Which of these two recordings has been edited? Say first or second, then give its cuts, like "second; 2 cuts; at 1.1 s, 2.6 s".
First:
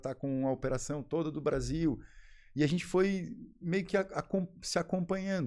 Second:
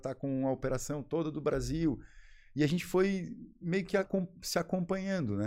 second; 1 cut; at 4.0 s